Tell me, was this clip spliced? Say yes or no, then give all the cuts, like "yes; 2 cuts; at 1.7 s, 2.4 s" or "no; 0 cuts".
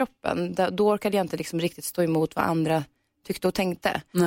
no; 0 cuts